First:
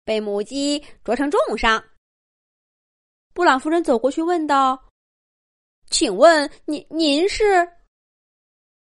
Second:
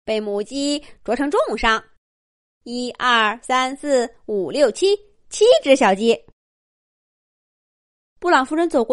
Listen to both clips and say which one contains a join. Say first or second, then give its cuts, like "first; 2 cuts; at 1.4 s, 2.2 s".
first; 1 cut; at 2.2 s